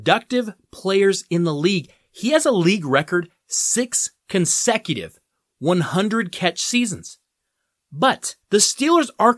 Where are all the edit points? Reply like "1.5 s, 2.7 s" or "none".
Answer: 8.4 s